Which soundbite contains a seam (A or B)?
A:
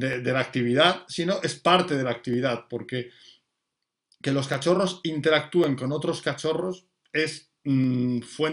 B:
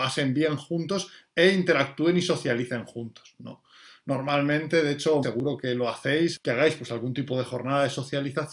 B